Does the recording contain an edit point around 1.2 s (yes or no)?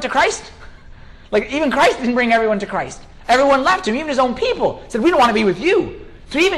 no